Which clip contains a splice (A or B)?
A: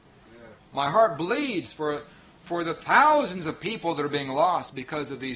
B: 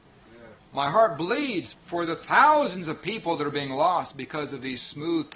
B